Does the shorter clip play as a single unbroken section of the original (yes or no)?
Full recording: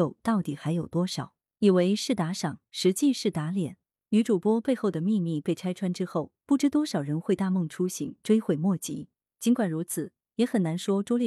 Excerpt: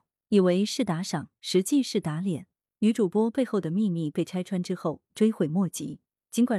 no